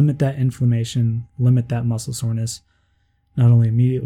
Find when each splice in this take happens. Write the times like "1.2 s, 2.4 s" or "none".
none